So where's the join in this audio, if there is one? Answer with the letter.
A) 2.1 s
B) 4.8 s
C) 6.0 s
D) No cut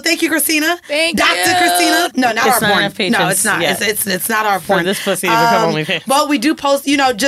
A